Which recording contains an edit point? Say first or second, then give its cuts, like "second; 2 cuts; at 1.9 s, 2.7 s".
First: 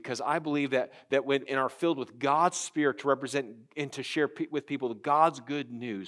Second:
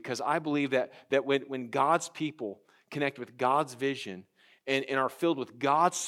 first; 1 cut; at 1.5 s